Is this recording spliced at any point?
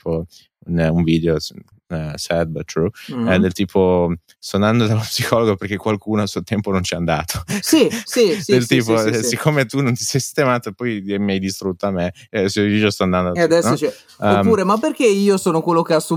yes; 1 cut; at 1.7 s

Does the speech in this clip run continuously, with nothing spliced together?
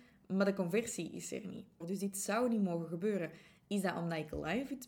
no; 1 cut; at 1.8 s

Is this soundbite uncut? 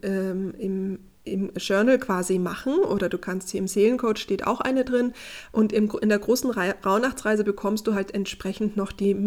yes; 0 cuts

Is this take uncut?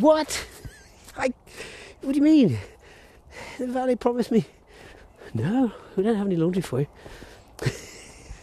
yes; 0 cuts

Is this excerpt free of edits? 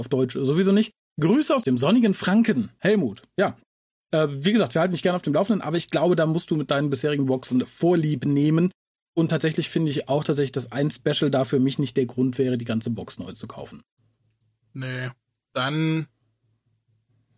yes; 0 cuts

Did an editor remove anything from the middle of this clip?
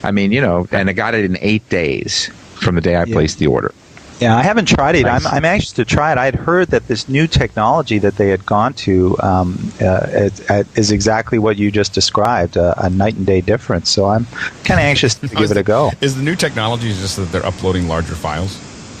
yes; 1 cut; at 15.2 s

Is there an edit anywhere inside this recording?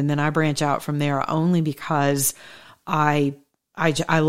no; 0 cuts

